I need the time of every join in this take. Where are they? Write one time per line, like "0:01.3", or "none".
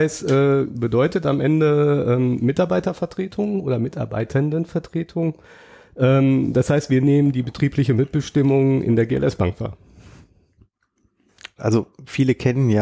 0:11.6